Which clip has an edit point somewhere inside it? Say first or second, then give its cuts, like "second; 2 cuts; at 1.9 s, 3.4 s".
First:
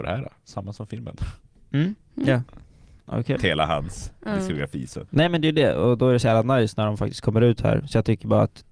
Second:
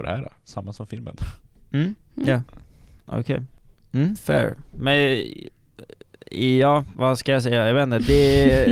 first; 2 cuts; at 3.4 s, 5.1 s